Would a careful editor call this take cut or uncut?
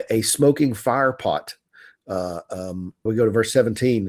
cut